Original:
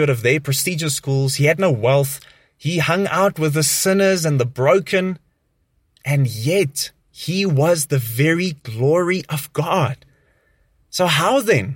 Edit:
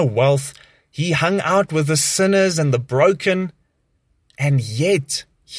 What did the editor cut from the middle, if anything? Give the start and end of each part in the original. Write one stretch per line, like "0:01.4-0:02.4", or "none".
none